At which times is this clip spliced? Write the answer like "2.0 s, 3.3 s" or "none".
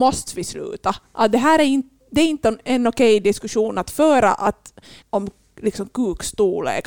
5.0 s